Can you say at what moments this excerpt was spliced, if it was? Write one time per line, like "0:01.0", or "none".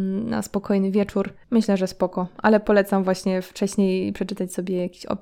0:01.4